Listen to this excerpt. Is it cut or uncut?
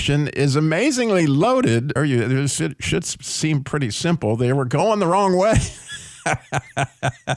cut